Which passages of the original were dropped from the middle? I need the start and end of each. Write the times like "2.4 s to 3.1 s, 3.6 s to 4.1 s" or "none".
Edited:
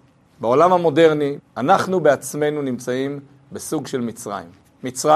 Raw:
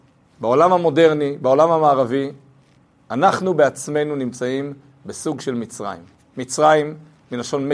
1.4 s to 2.9 s